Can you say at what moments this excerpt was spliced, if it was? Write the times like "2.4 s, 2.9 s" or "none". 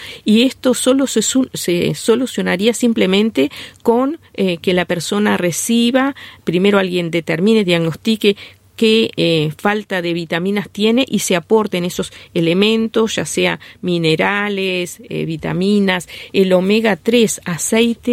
none